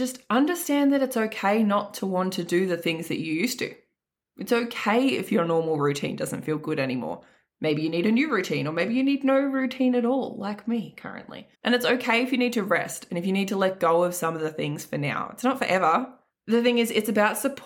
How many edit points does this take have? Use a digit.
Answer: 2